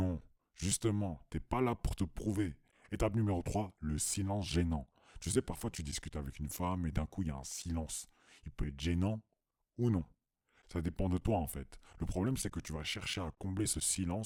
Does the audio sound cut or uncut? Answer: cut